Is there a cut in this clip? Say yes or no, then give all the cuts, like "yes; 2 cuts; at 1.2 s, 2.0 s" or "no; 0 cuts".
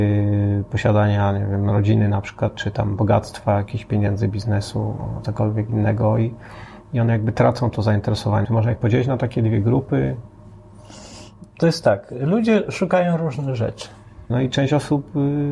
yes; 3 cuts; at 8.4 s, 11.4 s, 14.3 s